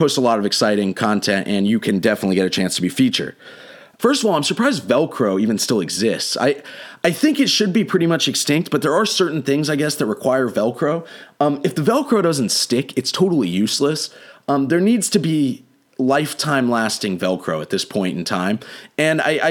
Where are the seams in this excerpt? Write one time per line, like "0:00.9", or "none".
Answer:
0:04.0